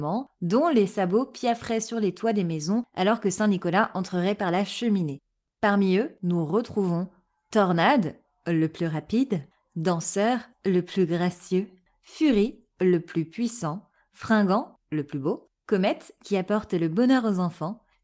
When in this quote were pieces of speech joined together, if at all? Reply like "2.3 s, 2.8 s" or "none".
5.4 s

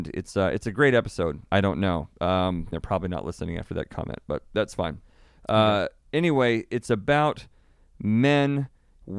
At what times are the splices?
1.5 s, 2.7 s

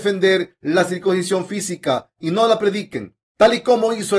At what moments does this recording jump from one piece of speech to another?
3.2 s

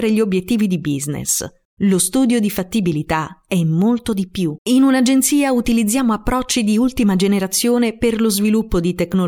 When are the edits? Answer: 1.7 s, 4.6 s

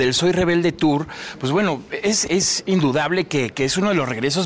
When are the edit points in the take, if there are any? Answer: none

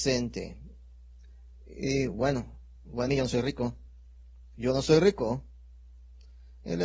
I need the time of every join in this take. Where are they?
3.1 s

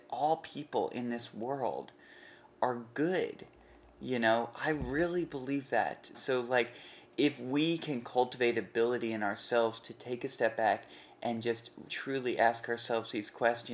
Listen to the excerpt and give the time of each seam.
6.1 s, 11.9 s

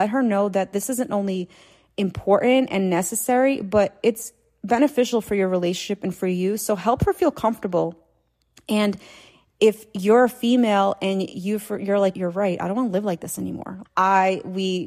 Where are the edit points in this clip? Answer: 12.1 s, 13.9 s

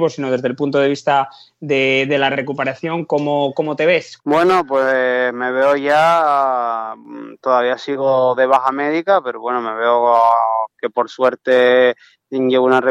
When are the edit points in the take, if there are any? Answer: 4.2 s

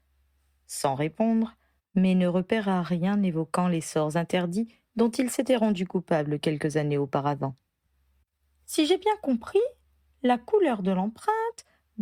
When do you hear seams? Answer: 1.8 s

